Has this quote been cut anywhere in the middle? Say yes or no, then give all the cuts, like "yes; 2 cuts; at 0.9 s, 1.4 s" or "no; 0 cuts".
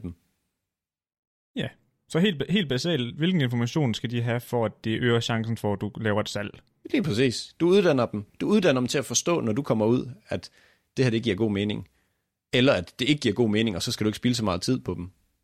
no; 0 cuts